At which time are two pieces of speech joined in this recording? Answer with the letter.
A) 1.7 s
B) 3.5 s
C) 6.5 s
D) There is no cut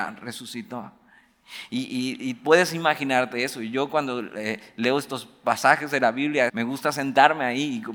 C